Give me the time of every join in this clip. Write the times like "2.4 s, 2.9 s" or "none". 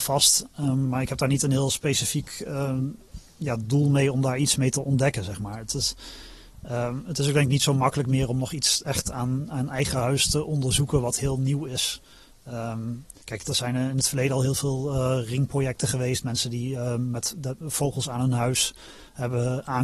13.2 s